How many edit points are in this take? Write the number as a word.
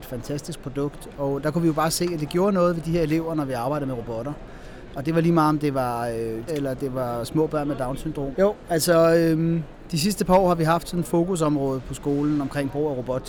two